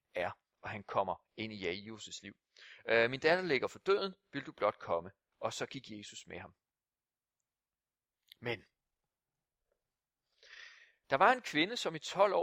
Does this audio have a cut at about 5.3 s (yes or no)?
no